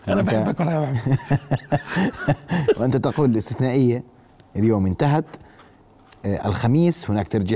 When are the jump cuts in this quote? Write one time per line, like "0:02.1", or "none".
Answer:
none